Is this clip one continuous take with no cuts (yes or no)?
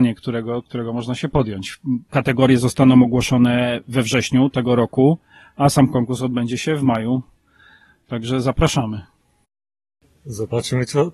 no